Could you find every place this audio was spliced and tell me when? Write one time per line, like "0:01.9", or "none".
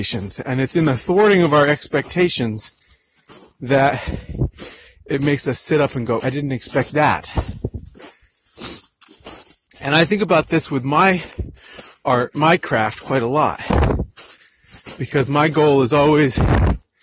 0:06.2

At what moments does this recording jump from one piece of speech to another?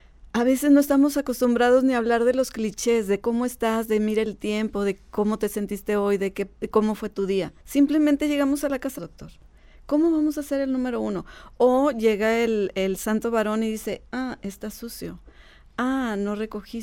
0:07.6
0:09.0

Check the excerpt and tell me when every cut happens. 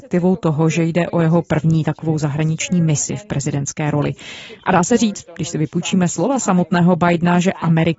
0:04.6

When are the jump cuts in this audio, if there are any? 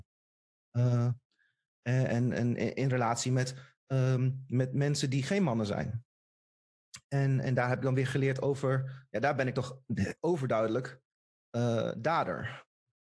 none

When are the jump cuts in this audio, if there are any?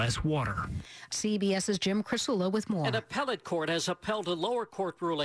0:01.1

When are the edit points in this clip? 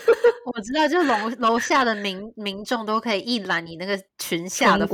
none

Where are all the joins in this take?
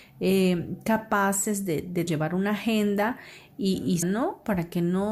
0:02.1
0:04.0

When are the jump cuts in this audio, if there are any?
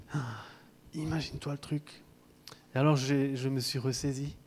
none

